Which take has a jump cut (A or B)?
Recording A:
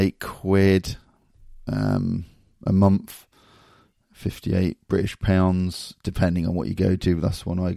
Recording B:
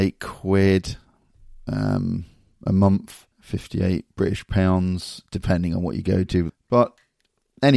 B